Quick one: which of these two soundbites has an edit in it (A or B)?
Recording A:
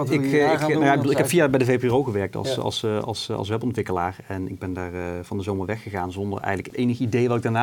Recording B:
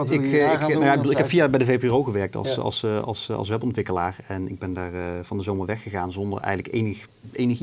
A